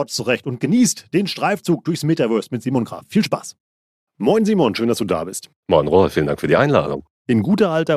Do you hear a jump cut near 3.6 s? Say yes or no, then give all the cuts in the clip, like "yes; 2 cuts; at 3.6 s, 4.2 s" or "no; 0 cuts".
no; 0 cuts